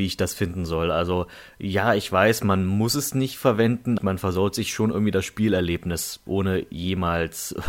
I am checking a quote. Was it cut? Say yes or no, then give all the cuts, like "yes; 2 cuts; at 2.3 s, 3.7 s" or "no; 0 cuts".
yes; 2 cuts; at 4.0 s, 6.3 s